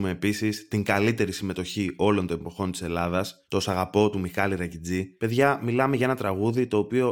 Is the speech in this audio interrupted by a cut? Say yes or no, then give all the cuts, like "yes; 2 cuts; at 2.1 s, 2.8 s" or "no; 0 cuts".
no; 0 cuts